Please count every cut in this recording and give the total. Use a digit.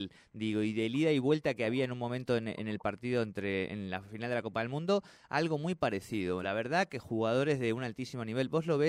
0